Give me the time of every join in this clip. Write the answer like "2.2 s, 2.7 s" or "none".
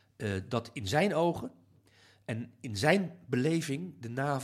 none